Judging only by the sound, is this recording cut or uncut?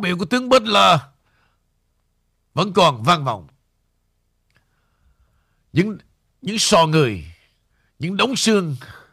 uncut